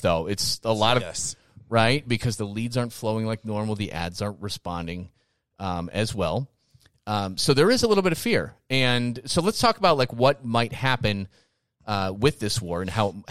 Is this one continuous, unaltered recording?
no; 1 cut; at 1.0 s

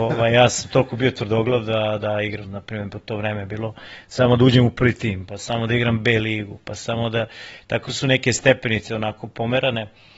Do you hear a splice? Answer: yes; 1 cut; at 2.4 s

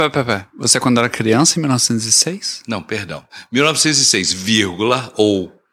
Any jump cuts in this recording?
no; 0 cuts

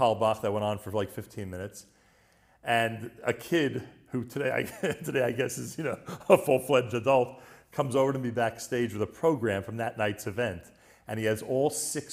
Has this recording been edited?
no; 0 cuts

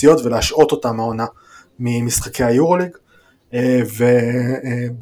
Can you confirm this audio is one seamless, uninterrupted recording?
yes; 0 cuts

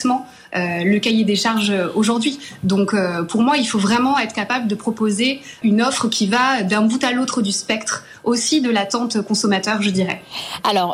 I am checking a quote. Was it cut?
yes; 1 cut; at 5.6 s

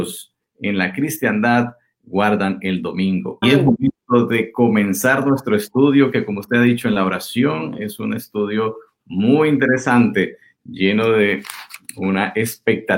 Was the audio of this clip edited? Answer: yes; 1 cut; at 3.4 s

